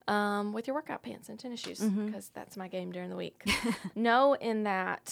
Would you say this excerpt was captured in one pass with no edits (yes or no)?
no